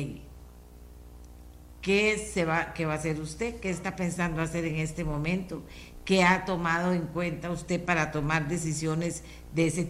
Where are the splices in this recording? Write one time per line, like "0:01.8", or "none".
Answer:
none